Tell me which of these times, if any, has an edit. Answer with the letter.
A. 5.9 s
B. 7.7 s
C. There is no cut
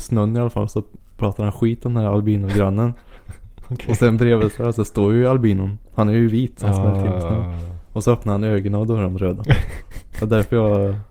C